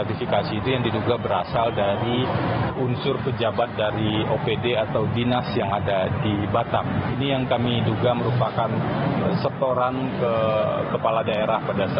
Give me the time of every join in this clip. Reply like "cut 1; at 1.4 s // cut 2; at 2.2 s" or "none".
cut 1; at 2.8 s